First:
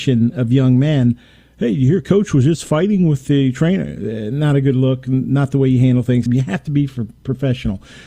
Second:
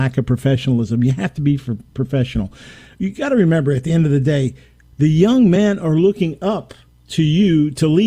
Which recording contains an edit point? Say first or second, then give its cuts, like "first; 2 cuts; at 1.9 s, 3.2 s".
first; 1 cut; at 6.3 s